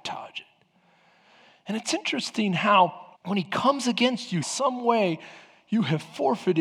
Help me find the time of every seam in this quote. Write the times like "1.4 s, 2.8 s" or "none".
3.1 s, 4.4 s